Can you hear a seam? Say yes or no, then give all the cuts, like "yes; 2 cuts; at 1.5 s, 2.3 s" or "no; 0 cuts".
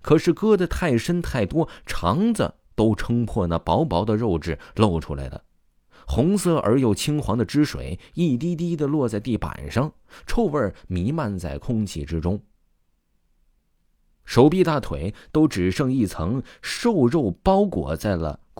no; 0 cuts